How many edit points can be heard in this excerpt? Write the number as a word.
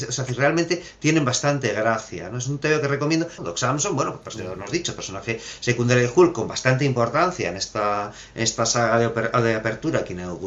one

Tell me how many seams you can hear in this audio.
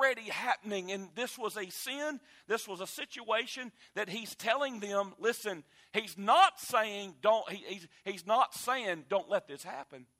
zero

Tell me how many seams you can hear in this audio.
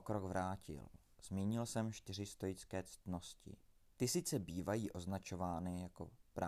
one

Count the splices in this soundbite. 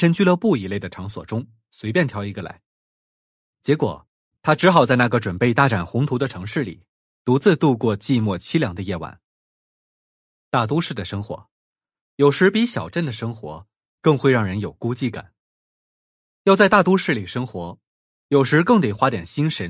zero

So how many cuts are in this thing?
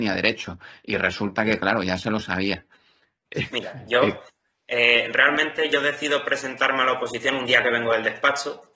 zero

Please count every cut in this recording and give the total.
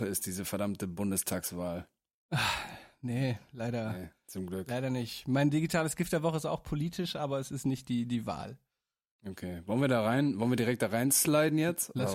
zero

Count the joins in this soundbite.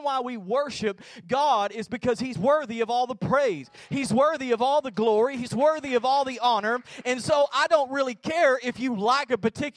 zero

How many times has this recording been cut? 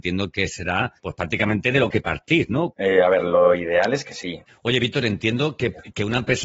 three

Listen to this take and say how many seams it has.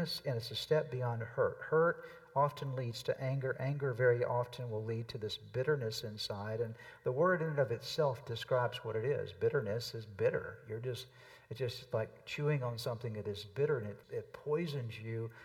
one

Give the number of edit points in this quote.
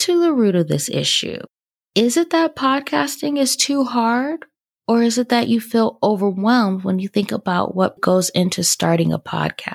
one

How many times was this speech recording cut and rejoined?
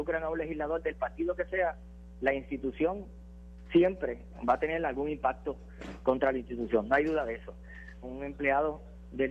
one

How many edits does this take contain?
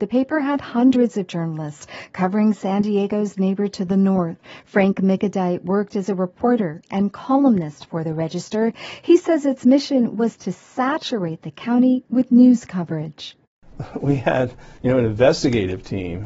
one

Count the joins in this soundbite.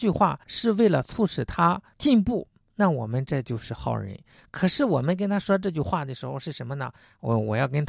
zero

